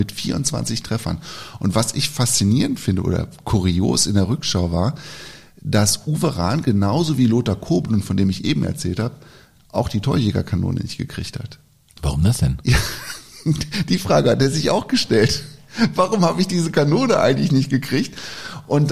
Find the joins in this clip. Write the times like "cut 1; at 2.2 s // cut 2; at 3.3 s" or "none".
none